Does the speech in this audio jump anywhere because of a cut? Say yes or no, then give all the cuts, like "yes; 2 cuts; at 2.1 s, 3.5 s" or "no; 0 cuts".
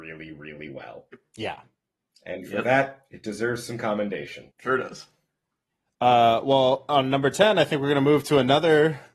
yes; 1 cut; at 4.5 s